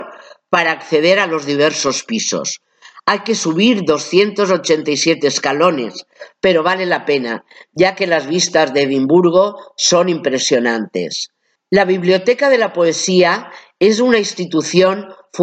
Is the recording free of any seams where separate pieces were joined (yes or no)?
no